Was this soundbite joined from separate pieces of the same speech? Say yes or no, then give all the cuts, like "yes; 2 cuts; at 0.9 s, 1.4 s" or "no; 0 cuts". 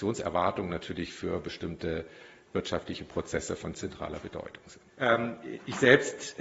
yes; 1 cut; at 4.9 s